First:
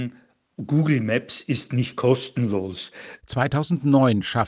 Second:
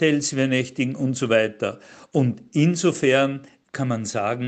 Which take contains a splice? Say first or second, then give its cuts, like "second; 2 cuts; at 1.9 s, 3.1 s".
first; 1 cut; at 3.2 s